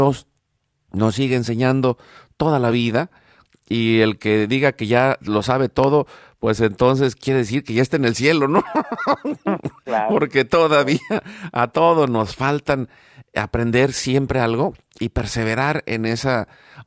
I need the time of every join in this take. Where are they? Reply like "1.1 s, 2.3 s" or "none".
none